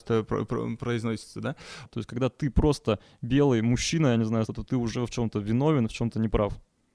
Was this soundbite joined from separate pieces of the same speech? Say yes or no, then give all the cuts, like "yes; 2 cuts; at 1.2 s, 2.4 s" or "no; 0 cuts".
yes; 2 cuts; at 1.9 s, 4.5 s